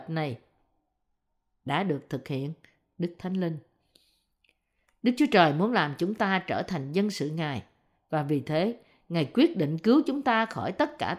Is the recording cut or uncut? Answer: uncut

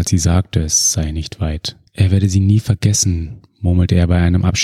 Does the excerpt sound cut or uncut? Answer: cut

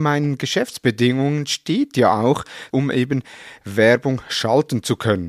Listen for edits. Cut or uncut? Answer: cut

